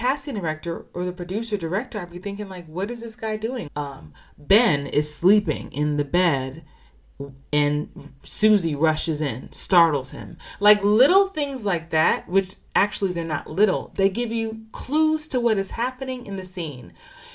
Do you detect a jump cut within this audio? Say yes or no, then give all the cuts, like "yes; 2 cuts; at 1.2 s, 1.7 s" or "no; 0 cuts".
yes; 1 cut; at 3.7 s